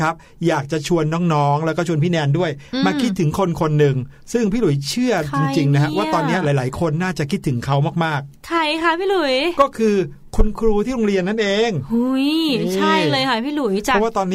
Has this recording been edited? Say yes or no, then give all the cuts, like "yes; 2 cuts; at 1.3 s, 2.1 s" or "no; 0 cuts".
no; 0 cuts